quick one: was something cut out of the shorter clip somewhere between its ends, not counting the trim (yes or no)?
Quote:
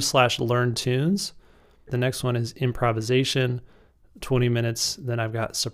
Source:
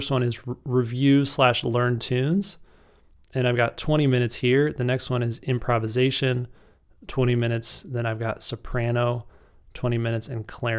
yes